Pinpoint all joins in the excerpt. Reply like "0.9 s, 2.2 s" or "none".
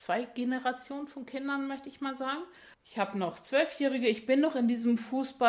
2.7 s